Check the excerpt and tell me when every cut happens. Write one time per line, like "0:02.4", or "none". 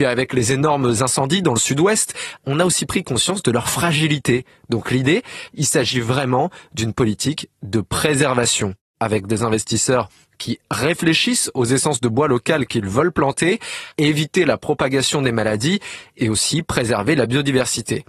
0:02.4
0:05.5
0:13.9